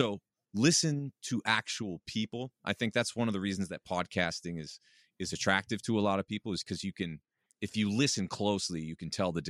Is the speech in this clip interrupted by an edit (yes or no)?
no